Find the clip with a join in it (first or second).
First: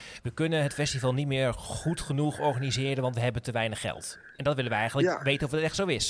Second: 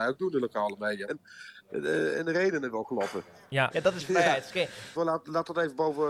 second